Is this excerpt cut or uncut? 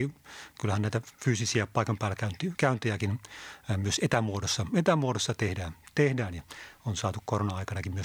uncut